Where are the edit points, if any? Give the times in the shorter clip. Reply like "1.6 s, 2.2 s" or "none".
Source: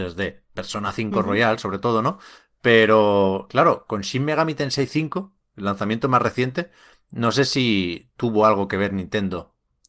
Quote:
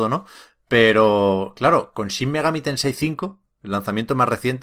none